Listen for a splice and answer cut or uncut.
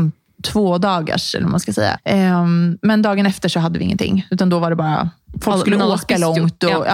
cut